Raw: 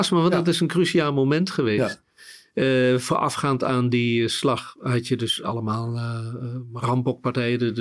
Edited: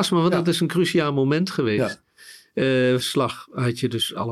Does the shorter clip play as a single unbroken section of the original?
no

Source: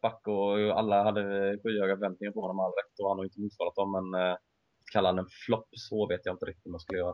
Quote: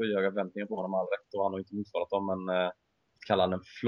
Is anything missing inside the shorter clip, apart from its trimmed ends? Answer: no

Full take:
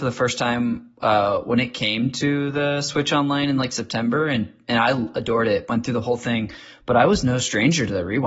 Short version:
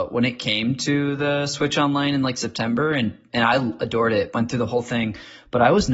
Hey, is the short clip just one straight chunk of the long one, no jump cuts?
yes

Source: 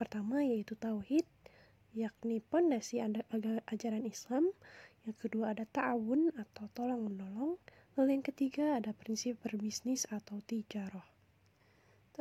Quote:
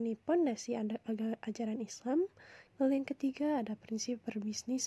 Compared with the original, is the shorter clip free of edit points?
no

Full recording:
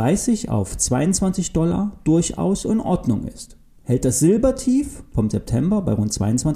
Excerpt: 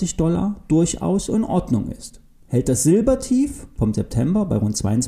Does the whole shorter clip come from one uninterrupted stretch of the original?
yes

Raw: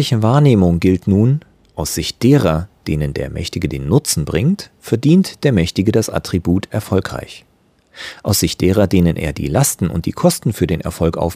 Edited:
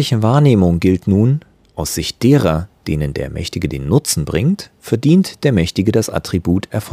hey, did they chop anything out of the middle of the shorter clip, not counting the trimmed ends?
no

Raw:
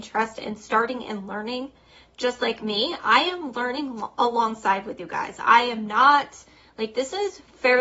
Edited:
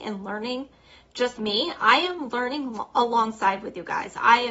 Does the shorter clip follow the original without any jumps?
no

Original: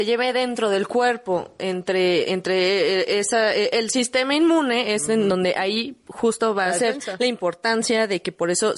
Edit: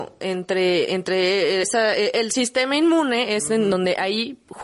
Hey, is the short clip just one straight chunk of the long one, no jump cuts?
no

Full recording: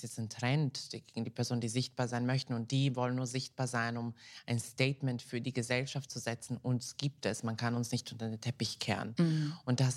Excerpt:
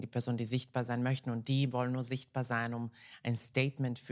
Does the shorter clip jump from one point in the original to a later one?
no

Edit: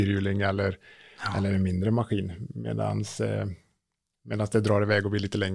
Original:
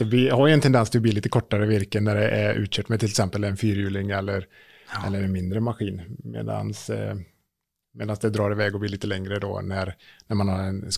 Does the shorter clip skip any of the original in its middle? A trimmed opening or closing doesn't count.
no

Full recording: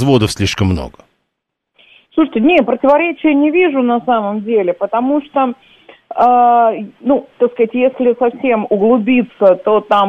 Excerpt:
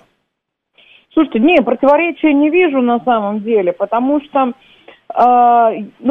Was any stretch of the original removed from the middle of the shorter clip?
no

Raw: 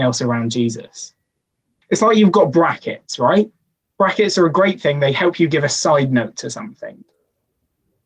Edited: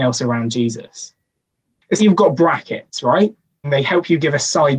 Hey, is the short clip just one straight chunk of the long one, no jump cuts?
no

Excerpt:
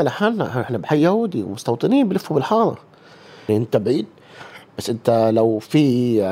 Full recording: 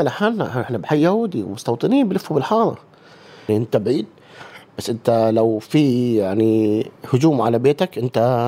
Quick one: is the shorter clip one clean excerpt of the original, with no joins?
yes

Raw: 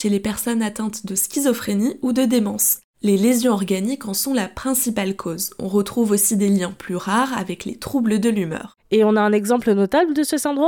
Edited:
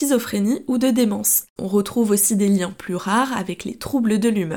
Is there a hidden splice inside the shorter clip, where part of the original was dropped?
yes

